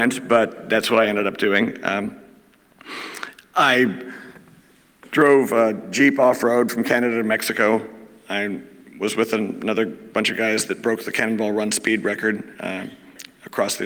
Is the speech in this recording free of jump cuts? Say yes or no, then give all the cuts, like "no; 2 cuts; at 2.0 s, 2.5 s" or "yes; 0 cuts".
yes; 0 cuts